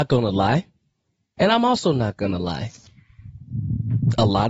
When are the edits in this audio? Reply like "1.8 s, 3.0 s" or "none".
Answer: 1.4 s

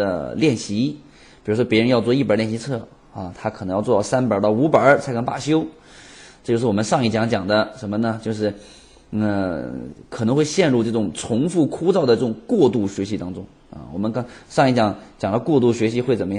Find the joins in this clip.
none

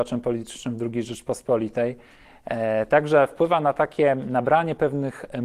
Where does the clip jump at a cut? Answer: none

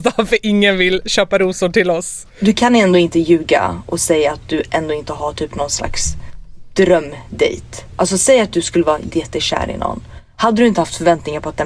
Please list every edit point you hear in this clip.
9.1 s

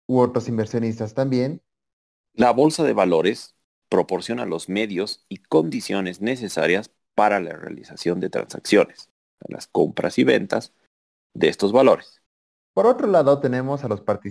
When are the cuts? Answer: 2.2 s, 12.6 s

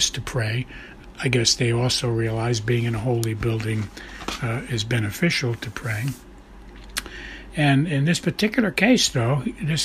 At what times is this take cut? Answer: none

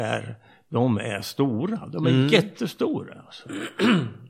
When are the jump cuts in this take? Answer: none

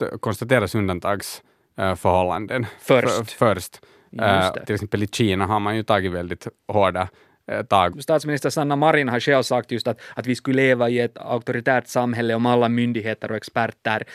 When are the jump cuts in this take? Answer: 4.6 s, 7.9 s

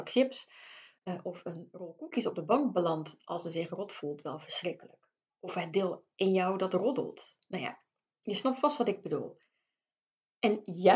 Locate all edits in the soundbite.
none

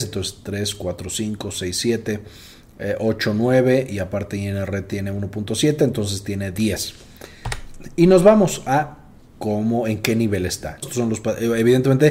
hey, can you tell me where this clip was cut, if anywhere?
10.8 s

